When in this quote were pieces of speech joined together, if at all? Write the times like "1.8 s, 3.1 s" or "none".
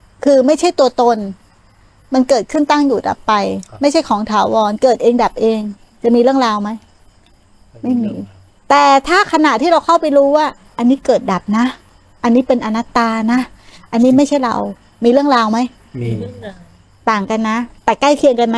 none